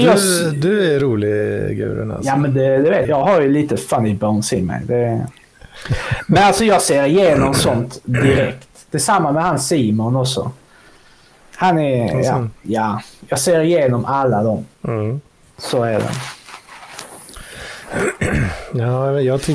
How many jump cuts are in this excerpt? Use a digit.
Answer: 2